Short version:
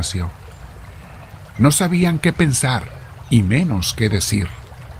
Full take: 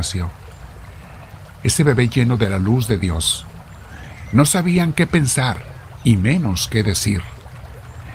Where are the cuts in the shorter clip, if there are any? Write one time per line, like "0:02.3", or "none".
0:01.6